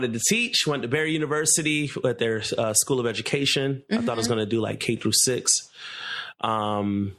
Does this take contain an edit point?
no; 0 cuts

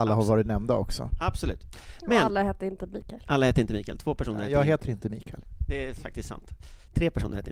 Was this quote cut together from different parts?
no; 0 cuts

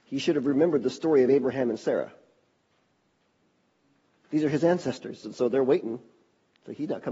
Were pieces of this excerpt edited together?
yes; 1 cut; at 5.2 s

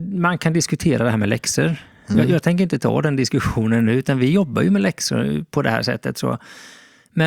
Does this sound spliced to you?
no; 0 cuts

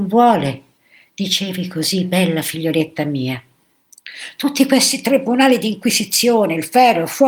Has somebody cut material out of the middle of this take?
no; 0 cuts

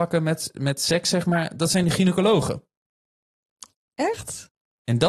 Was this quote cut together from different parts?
no; 0 cuts

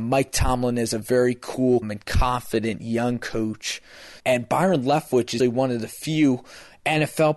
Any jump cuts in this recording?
yes; 3 cuts; at 1.8 s, 4.2 s, 5.4 s

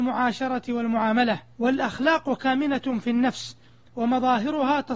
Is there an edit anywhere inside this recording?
yes; 1 cut; at 1.5 s

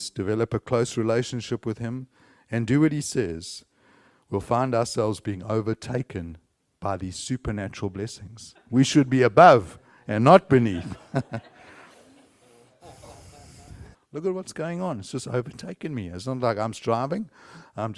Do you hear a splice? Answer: yes; 2 cuts; at 8.5 s, 13.9 s

